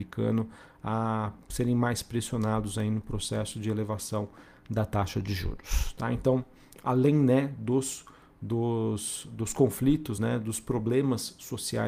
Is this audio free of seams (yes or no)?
yes